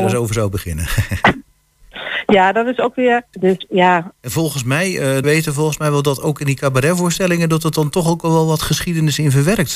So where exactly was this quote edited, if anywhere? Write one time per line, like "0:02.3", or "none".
0:03.3
0:05.2